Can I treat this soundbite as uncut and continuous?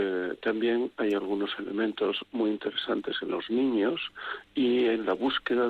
yes; 0 cuts

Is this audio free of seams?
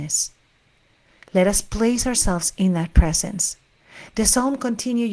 yes; 0 cuts

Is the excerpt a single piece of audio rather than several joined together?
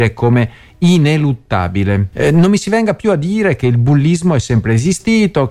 no; 1 cut; at 2.1 s

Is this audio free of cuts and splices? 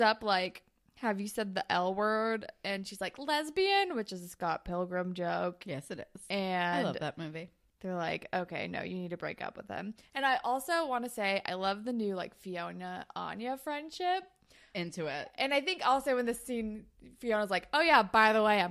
yes; 0 cuts

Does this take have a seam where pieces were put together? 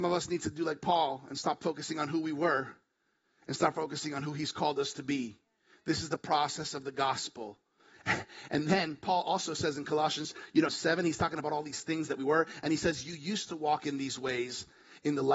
yes; 1 cut; at 10.7 s

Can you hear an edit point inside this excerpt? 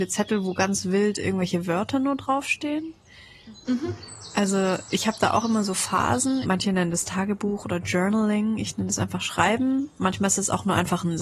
yes; 2 cuts; at 3.7 s, 6.4 s

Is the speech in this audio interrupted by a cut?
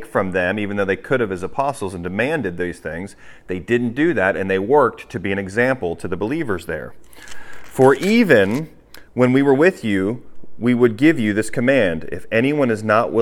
no; 0 cuts

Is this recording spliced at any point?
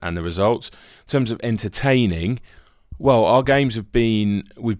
no; 0 cuts

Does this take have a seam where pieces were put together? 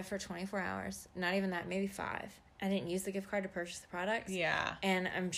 yes; 1 cut; at 2.5 s

